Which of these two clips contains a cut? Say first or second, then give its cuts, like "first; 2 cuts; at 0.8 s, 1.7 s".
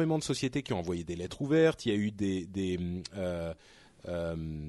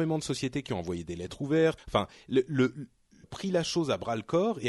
second; 2 cuts; at 1.8 s, 3.2 s